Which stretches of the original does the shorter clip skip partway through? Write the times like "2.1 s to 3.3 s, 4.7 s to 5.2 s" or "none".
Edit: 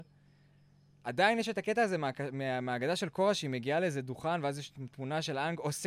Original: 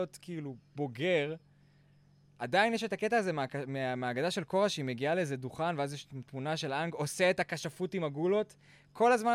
none